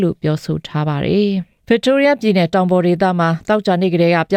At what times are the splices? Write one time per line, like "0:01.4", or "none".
0:01.6